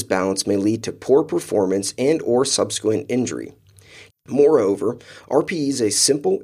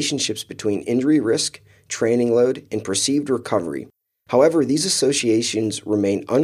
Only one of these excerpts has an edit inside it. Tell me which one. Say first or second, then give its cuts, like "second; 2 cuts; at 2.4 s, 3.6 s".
first; 1 cut; at 4.1 s